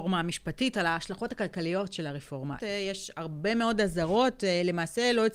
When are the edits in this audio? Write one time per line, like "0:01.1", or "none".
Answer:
0:02.6